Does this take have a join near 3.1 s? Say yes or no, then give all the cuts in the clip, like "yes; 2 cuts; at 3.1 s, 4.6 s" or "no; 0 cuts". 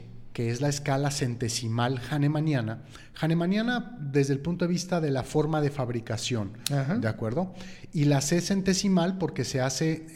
no; 0 cuts